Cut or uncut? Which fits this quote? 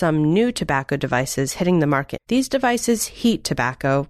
cut